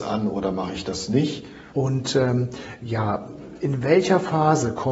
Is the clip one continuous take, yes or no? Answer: no